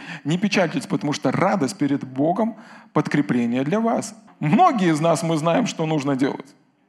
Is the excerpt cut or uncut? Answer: cut